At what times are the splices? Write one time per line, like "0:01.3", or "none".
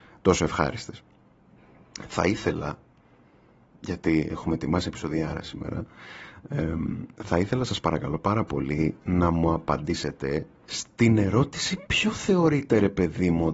none